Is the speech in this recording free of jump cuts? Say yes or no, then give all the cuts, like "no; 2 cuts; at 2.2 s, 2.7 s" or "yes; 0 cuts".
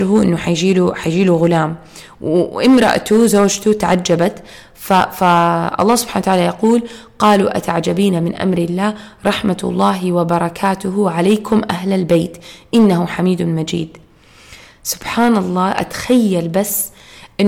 yes; 0 cuts